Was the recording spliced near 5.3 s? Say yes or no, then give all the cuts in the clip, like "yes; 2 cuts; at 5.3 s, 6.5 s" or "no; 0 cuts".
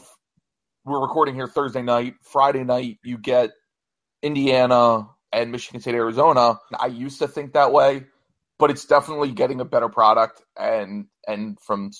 yes; 2 cuts; at 5.3 s, 6.7 s